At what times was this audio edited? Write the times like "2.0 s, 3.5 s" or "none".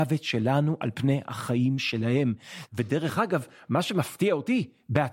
2.7 s